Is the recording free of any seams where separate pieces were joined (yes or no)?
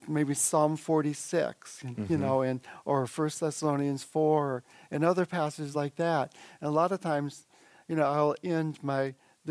yes